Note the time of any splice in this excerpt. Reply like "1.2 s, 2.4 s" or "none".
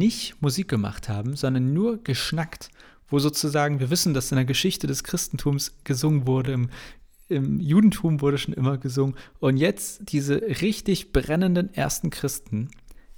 none